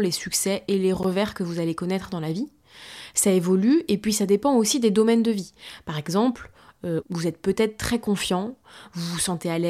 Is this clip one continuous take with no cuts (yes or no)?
no